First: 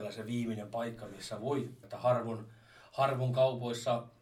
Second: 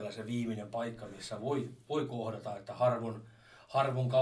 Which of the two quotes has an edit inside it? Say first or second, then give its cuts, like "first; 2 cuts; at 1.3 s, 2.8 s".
first; 1 cut; at 1.8 s